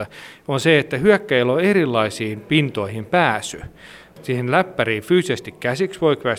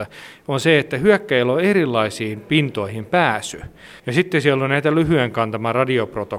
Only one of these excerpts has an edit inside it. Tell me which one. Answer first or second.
second